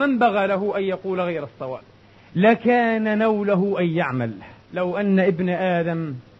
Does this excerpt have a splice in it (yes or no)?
yes